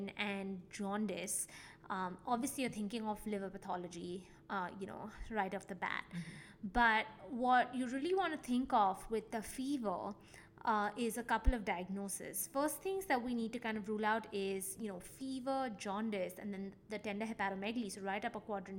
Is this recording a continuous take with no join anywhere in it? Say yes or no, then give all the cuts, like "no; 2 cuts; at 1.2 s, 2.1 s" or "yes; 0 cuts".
yes; 0 cuts